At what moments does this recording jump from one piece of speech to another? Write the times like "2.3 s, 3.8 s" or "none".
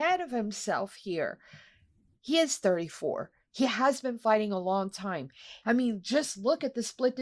5.6 s